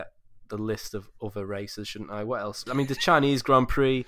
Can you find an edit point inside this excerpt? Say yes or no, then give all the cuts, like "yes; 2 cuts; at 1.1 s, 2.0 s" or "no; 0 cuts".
yes; 1 cut; at 2.7 s